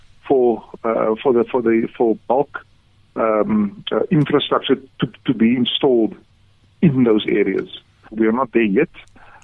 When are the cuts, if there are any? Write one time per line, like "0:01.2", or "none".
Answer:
0:08.1